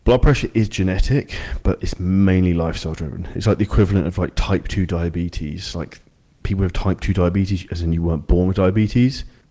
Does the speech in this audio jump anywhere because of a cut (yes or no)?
no